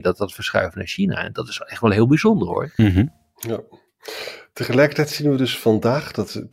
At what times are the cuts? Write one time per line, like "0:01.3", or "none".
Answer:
none